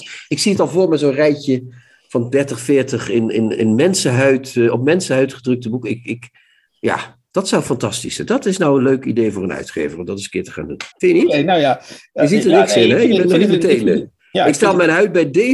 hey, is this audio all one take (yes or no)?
no